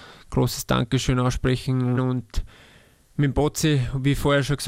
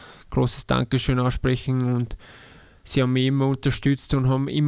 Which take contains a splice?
first; 1 cut; at 2.0 s

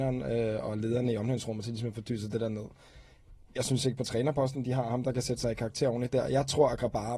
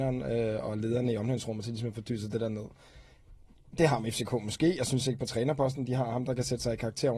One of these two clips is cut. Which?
first; 1 cut; at 3.6 s

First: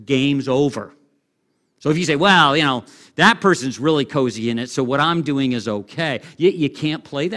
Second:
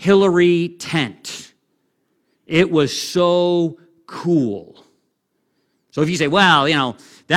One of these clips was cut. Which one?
second; 1 cut; at 5.7 s

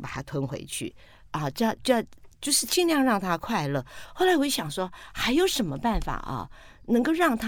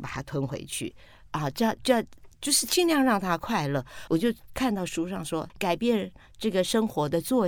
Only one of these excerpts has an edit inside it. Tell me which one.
second; 2 cuts; at 4.1 s, 5.5 s

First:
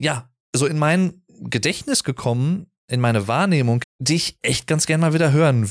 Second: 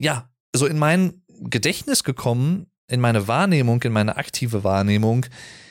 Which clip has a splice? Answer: first; 1 cut; at 3.8 s

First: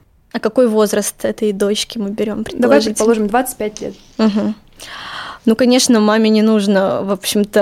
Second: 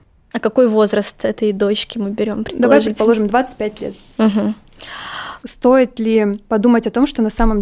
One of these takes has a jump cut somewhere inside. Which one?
second; 1 cut; at 5.4 s

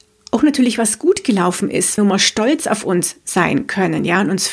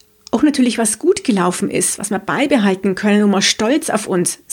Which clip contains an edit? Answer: first; 1 cut; at 2.0 s

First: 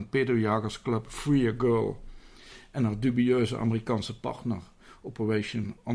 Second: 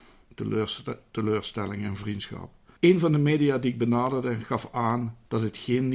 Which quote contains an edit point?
second; 1 cut; at 2.8 s

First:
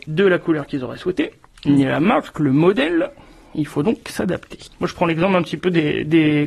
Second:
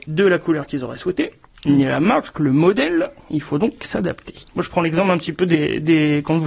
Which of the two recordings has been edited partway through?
second; 1 cut; at 3.2 s

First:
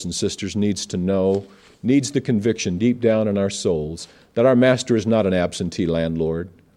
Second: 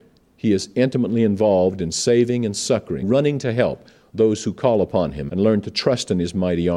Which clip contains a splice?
second; 2 cuts; at 3.0 s, 5.3 s

